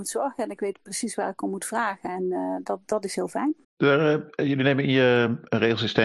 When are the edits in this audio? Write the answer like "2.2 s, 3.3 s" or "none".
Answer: 3.6 s

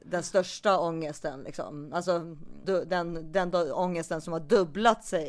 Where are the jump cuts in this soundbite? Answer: 2.6 s

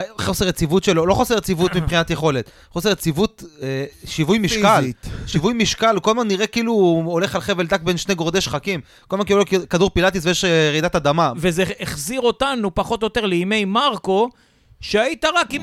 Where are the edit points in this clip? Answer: 11.3 s

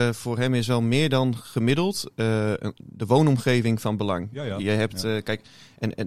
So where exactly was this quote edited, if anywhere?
2.7 s

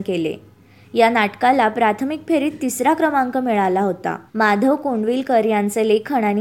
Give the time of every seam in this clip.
4.3 s

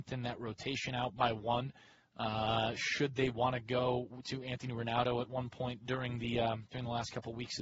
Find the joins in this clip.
none

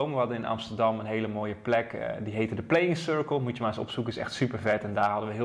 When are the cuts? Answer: none

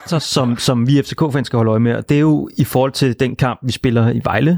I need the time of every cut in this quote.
none

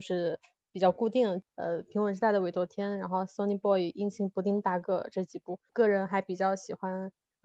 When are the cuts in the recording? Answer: 4.8 s

